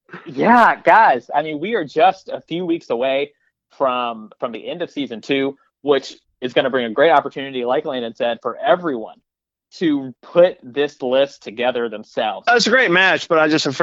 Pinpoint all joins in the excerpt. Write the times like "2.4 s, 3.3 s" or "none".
12.5 s